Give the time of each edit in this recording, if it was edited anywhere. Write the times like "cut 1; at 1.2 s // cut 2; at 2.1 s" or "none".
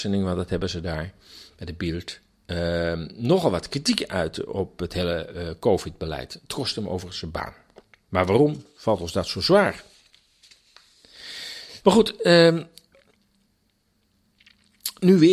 cut 1; at 8.0 s // cut 2; at 11.8 s